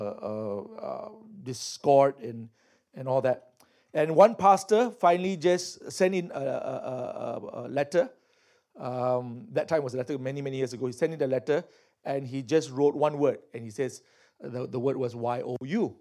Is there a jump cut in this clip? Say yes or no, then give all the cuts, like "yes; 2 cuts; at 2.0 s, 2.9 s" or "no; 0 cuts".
no; 0 cuts